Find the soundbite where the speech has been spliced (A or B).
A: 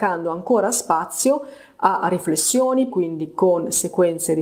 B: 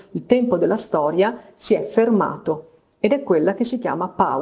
A